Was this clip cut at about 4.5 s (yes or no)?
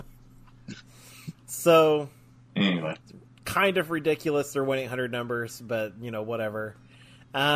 no